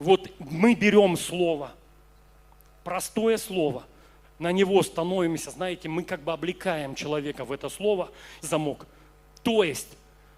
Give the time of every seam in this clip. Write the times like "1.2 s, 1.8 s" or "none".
8.4 s